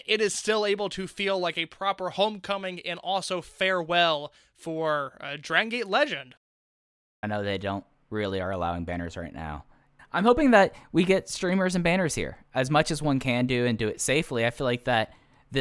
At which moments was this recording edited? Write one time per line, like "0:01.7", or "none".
0:07.2
0:10.0